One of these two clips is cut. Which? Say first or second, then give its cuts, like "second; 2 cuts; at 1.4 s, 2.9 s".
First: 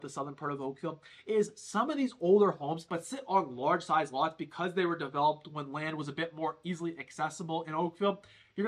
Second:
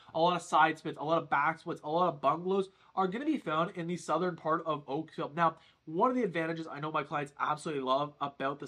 first; 1 cut; at 2.9 s